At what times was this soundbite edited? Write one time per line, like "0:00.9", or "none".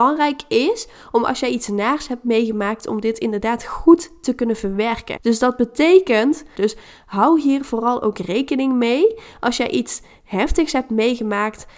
0:05.2
0:06.6

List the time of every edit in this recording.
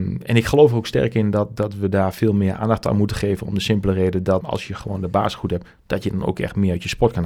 0:04.4

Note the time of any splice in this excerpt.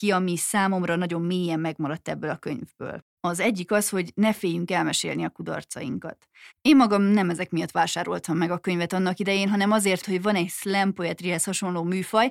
0:03.1
0:06.5
0:10.0

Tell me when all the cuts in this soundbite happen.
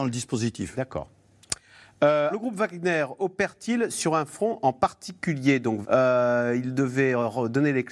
0:02.3
0:05.8

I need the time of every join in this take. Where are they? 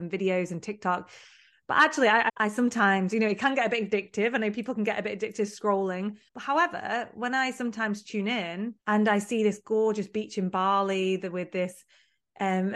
0:02.3
0:06.3
0:08.8

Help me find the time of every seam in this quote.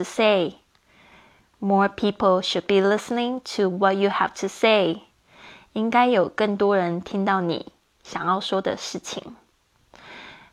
none

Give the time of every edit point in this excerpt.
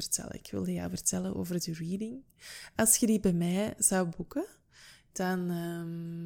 none

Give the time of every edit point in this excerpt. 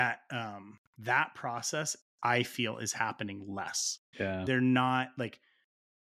0:04.1

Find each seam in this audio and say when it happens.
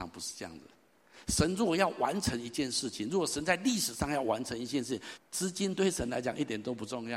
0:05.2

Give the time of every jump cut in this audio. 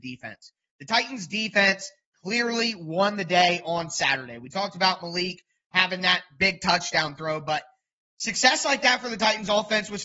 none

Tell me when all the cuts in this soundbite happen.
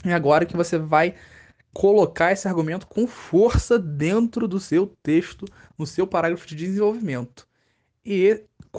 none

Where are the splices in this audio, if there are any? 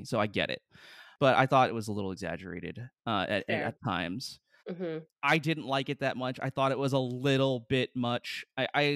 0:04.6

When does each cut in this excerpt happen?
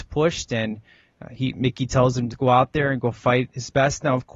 0:02.3

